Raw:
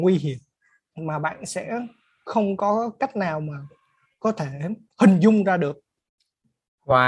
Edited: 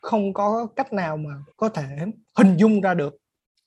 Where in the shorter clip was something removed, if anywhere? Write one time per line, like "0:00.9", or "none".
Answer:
0:01.5